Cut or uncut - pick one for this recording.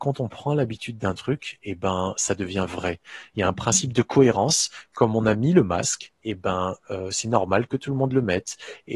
uncut